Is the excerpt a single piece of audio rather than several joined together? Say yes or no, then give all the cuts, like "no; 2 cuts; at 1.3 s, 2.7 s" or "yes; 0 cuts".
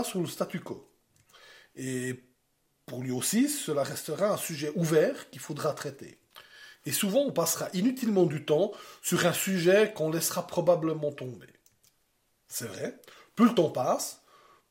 yes; 0 cuts